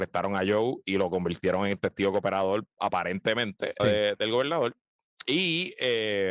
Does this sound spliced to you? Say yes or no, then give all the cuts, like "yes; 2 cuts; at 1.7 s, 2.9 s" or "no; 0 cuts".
yes; 1 cut; at 3.8 s